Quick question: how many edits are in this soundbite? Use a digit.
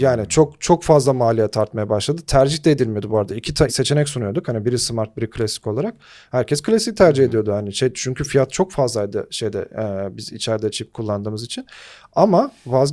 1